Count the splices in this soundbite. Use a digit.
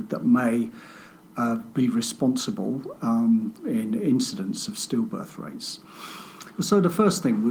2